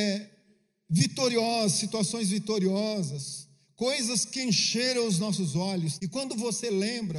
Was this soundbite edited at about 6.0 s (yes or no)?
yes